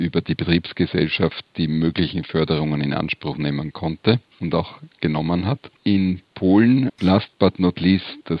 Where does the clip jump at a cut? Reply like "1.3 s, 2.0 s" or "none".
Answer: 5.8 s, 6.9 s